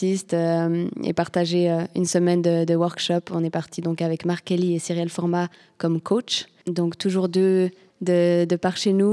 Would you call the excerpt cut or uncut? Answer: cut